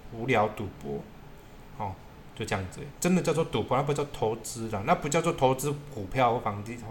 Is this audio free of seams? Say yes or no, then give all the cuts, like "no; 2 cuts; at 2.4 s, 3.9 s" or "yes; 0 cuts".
yes; 0 cuts